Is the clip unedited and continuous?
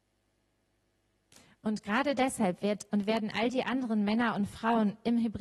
no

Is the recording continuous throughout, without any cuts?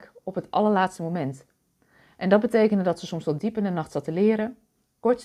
yes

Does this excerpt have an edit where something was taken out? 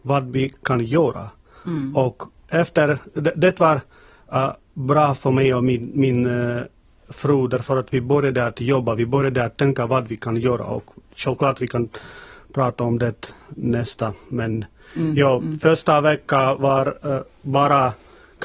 no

